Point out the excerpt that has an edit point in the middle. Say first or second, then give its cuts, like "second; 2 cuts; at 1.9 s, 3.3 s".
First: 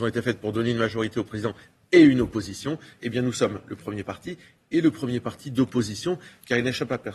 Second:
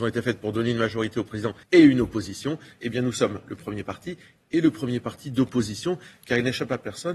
second; 1 cut; at 1.6 s